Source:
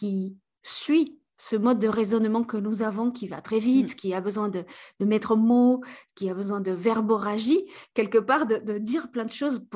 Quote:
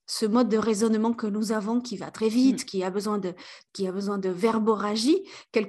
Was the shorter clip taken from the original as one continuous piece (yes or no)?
no